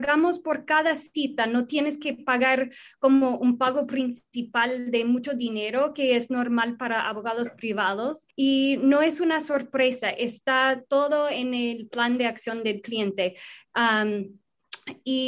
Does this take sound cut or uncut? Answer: cut